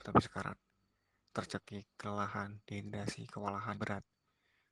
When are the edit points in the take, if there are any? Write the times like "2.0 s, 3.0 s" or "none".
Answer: 3.7 s